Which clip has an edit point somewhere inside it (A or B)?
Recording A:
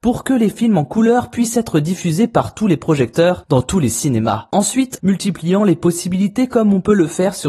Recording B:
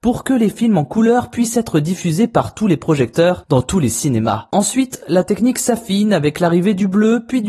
A